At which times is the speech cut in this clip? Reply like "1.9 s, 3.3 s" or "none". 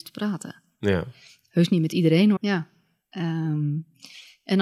2.4 s